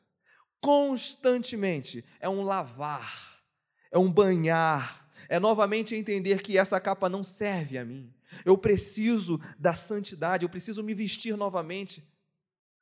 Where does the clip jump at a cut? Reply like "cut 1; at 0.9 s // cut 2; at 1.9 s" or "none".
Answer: none